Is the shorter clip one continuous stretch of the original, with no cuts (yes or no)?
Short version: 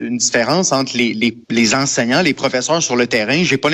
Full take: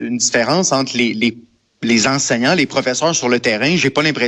no